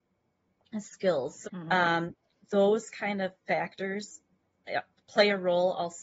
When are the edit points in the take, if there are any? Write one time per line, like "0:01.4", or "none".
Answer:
0:01.4